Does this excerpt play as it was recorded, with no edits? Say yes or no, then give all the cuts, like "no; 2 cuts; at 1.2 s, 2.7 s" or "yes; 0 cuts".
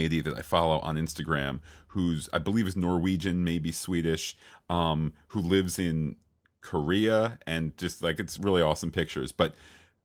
yes; 0 cuts